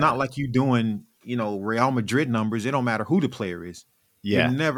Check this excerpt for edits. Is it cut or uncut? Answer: uncut